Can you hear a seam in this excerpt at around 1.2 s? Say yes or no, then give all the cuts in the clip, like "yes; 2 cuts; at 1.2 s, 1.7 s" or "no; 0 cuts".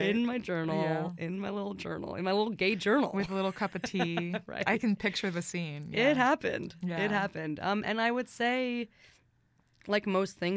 no; 0 cuts